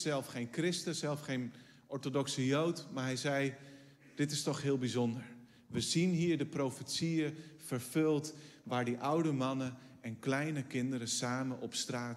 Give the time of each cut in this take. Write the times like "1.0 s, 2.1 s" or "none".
none